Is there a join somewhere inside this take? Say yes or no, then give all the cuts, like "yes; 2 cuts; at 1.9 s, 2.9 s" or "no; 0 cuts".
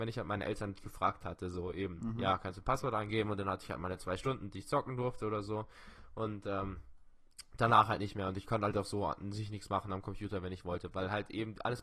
no; 0 cuts